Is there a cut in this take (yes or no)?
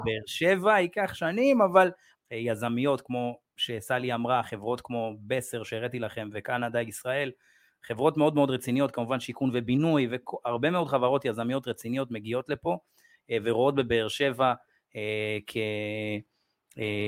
yes